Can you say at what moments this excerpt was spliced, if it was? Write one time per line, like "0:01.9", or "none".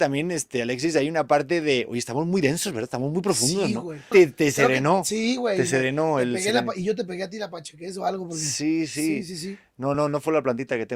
0:04.1
0:09.9